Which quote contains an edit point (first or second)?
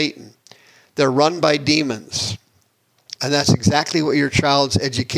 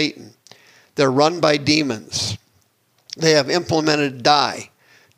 first